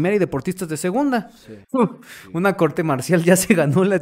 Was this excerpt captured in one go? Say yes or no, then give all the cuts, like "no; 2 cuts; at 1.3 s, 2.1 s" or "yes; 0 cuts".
no; 1 cut; at 1.6 s